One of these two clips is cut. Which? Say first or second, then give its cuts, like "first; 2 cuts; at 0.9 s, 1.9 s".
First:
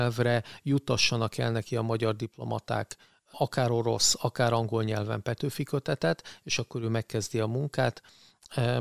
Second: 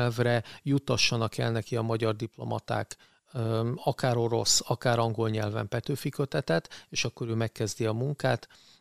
first; 1 cut; at 3.3 s